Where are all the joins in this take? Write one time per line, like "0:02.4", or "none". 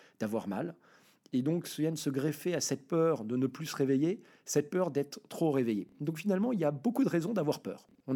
none

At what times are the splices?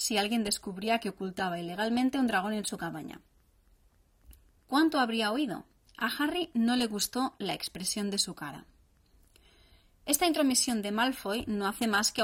0:04.6

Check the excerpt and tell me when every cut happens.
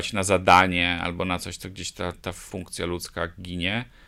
0:02.1

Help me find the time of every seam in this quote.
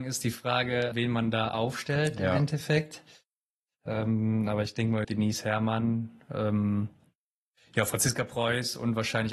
0:00.9
0:05.0

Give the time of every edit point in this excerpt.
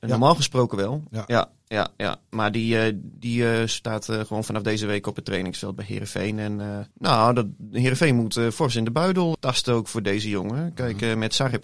0:06.9
0:09.3

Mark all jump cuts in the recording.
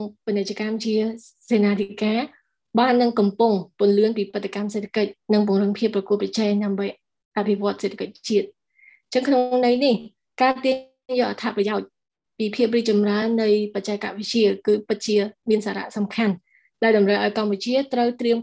none

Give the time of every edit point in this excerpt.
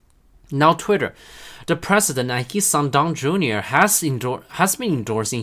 none

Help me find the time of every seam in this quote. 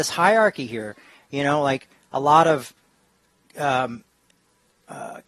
none

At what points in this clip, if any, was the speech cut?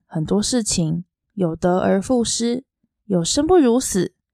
0:01.2

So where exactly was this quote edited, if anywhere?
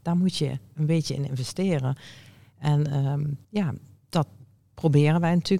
0:03.4

